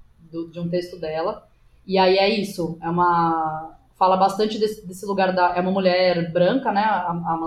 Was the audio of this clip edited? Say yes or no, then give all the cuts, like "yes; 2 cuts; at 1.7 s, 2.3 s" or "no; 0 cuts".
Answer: no; 0 cuts